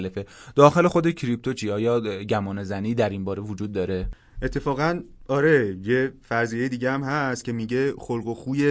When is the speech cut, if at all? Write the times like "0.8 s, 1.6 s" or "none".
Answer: none

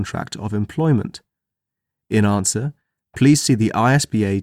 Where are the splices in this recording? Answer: none

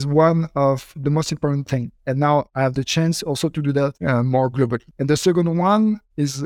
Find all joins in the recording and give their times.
2.0 s

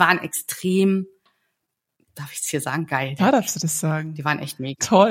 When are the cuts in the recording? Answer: 3.2 s

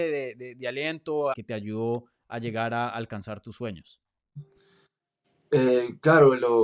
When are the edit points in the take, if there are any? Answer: 1.3 s

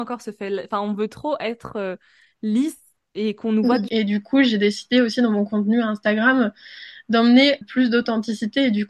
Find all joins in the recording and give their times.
3.9 s, 7.6 s

